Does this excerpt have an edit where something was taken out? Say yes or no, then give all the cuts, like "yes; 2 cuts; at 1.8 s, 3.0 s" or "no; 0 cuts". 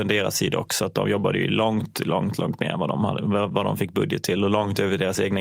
no; 0 cuts